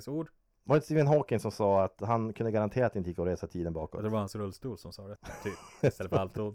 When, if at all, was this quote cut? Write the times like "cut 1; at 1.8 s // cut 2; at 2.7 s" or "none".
cut 1; at 5.2 s